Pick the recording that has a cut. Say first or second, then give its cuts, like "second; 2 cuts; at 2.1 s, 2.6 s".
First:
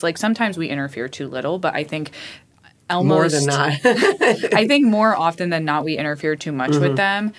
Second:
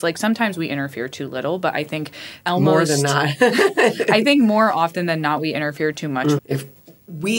second; 2 cuts; at 2.4 s, 6.4 s